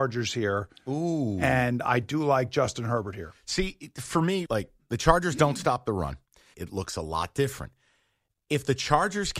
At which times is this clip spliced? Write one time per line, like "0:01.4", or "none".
0:04.5
0:06.5